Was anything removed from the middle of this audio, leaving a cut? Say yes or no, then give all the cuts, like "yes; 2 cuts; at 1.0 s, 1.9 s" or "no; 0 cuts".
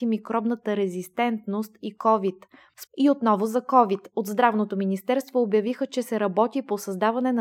yes; 1 cut; at 2.9 s